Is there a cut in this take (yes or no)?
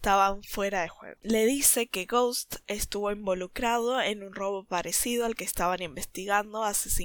yes